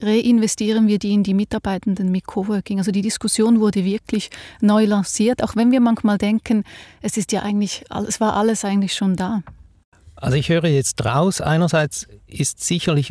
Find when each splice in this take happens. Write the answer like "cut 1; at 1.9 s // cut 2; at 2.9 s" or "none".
none